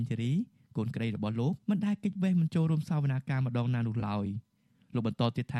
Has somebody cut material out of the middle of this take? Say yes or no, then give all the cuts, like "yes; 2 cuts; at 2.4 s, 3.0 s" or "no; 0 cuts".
yes; 1 cut; at 1.6 s